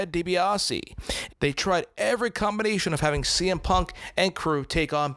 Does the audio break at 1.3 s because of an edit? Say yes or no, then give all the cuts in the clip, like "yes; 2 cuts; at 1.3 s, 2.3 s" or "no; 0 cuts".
yes; 1 cut; at 1.3 s